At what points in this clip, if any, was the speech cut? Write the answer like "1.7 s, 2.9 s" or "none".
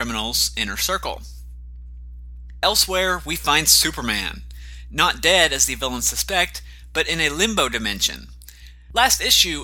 none